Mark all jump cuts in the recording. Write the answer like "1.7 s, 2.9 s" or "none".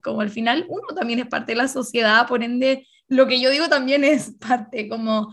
none